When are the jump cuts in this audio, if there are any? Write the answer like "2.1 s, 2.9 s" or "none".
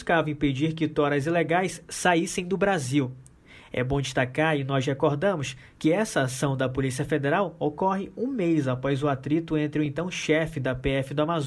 none